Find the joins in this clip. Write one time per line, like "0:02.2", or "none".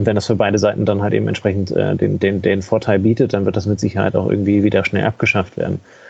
none